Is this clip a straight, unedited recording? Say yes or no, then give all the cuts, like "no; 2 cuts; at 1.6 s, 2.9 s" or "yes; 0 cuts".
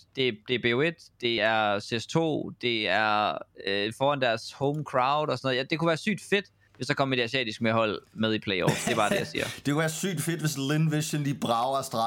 yes; 0 cuts